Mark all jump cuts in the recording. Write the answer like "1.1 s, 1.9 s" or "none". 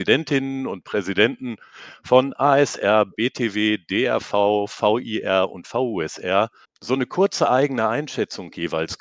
6.6 s